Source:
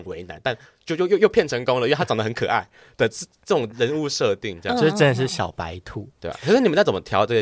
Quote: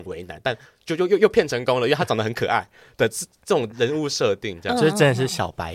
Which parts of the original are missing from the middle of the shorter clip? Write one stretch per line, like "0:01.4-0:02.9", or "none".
none

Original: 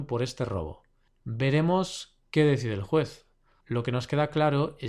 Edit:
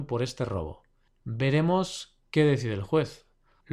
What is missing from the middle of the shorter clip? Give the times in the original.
none

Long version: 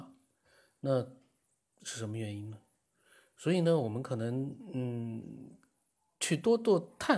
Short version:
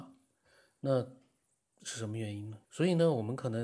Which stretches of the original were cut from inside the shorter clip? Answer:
0:02.6-0:03.3

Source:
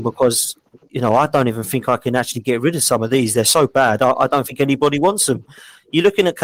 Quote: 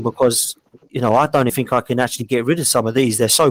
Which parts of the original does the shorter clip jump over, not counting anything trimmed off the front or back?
0:01.5-0:01.7

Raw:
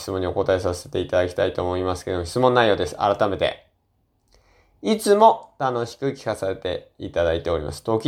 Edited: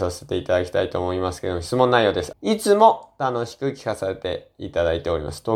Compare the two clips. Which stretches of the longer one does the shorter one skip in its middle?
0:03.0-0:04.7

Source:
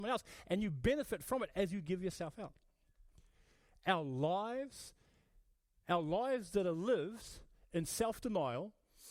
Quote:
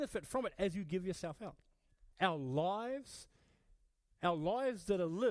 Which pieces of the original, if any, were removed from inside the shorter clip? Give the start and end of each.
0:03.1-0:03.8

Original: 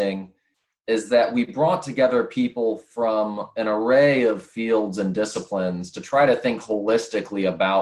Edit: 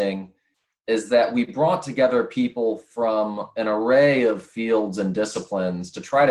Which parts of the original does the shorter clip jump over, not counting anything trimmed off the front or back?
none

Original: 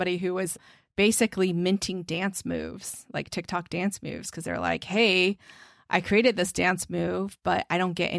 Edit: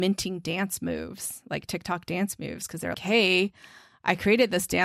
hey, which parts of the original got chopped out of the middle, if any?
0:04.6-0:04.8

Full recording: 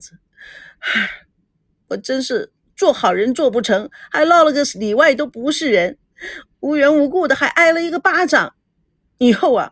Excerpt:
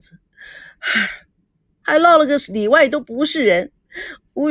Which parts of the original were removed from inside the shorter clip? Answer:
0:01.8-0:04.1

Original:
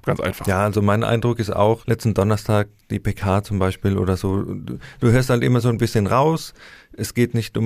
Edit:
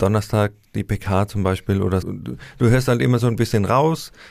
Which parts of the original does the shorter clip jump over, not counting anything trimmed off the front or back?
0:04.2-0:04.4

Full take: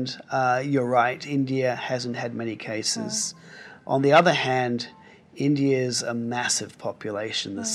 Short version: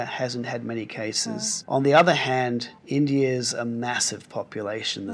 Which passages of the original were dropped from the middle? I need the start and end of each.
0:03.3-0:03.8
0:05.0-0:05.3

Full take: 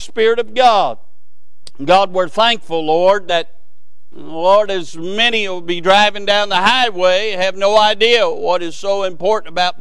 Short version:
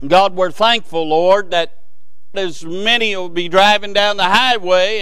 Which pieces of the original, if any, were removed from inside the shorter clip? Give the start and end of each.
0:04.1-0:04.7

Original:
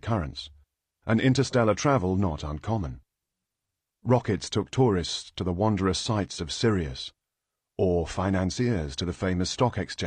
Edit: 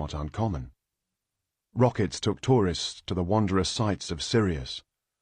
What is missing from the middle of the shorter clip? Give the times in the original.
none

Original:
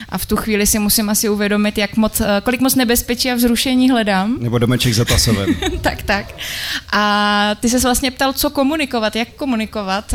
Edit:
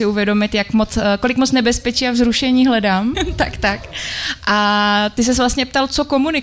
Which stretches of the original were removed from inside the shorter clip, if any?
0:04.4-0:05.6

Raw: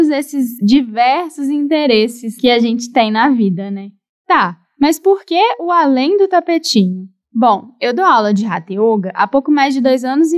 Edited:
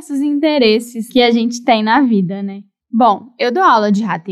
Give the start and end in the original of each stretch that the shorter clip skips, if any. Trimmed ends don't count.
0:04.1-0:07.2

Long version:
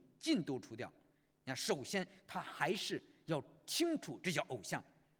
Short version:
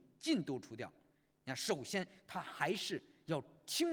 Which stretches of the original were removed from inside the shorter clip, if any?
none

